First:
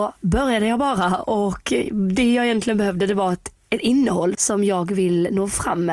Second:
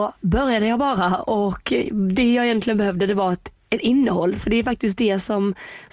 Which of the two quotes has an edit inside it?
first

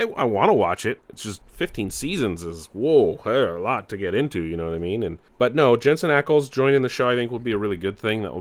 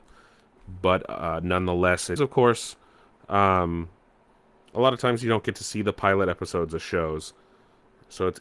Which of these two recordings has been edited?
second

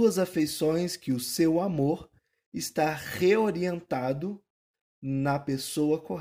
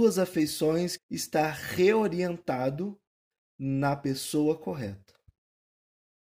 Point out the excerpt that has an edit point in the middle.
second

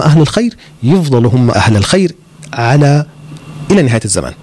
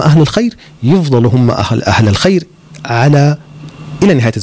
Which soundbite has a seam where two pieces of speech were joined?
first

